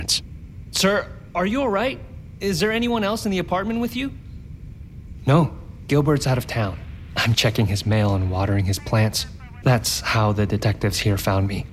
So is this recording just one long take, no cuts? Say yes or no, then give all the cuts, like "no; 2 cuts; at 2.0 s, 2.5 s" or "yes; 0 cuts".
no; 2 cuts; at 7.3 s, 9.6 s